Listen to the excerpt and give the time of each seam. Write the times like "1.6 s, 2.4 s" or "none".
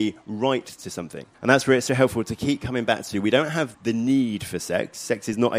1.3 s, 3.7 s